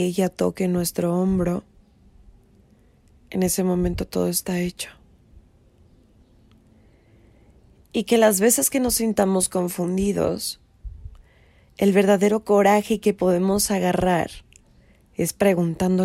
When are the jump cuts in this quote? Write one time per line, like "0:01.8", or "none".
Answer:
0:07.8